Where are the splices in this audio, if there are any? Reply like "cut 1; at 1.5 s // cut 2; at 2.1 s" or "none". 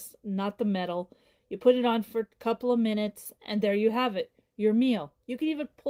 none